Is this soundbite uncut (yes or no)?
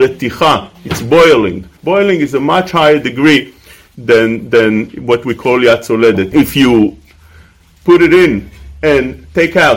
no